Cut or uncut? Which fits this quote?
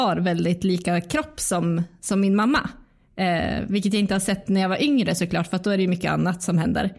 uncut